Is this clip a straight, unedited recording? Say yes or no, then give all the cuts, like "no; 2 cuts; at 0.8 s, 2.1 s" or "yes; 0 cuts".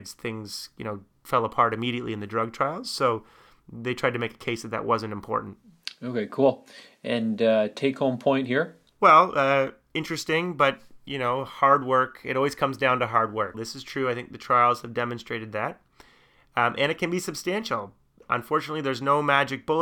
no; 1 cut; at 13.5 s